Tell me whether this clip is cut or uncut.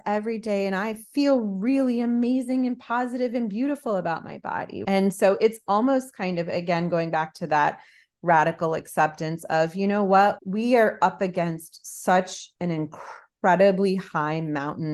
cut